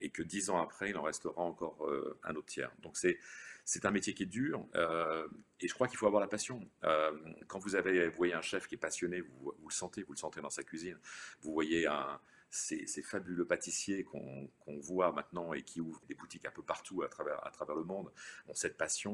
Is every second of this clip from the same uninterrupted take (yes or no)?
no